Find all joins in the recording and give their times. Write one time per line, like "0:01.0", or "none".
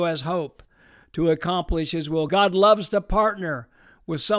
none